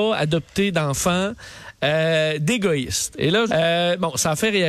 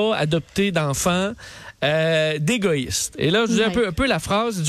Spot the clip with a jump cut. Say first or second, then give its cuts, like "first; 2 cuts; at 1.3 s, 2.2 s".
first; 1 cut; at 3.5 s